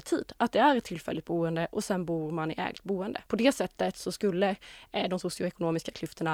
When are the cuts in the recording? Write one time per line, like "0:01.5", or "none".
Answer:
0:03.3